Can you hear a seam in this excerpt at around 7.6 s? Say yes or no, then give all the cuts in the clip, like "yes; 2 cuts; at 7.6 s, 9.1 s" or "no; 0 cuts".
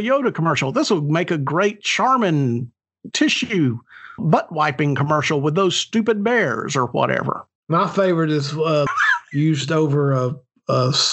yes; 3 cuts; at 4.2 s, 7.6 s, 8.9 s